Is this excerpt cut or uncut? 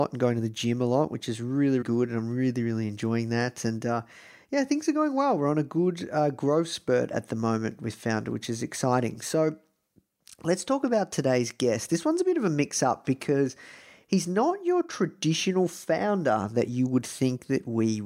cut